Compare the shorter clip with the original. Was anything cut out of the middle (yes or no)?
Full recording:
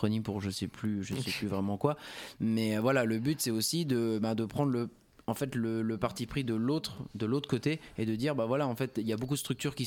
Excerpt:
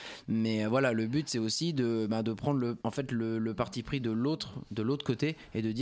yes